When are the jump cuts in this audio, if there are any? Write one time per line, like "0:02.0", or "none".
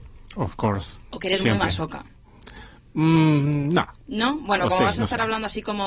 0:04.0